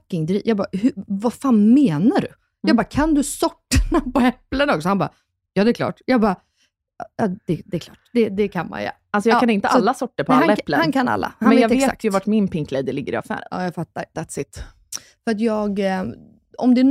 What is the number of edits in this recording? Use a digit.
1